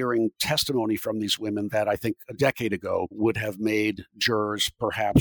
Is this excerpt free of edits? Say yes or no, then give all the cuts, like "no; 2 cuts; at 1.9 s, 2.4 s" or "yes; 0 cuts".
yes; 0 cuts